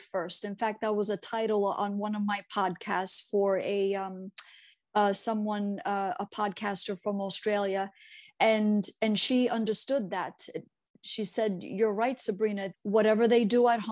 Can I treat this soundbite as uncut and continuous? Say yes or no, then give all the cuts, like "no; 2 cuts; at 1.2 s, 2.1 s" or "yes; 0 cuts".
no; 1 cut; at 12.7 s